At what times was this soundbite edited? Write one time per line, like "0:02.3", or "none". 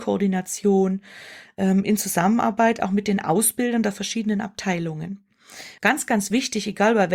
0:05.8